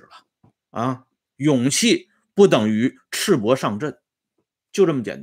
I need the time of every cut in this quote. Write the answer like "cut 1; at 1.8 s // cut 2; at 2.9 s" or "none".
cut 1; at 1.4 s